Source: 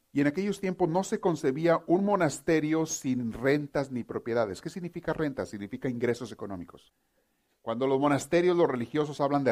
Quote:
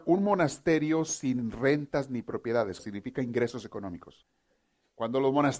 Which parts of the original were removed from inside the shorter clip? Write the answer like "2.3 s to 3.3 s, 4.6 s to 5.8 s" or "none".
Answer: 4.6 s to 5.5 s